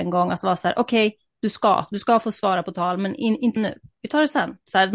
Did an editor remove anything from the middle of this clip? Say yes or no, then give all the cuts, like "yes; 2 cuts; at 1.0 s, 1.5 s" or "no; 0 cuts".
no; 0 cuts